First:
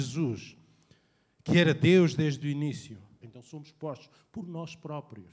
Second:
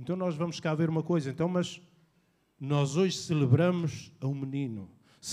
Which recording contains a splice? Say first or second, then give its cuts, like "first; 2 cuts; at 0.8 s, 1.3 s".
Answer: first; 1 cut; at 3.2 s